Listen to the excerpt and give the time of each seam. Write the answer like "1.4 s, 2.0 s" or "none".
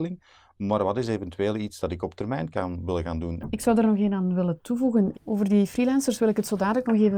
3.4 s, 5.1 s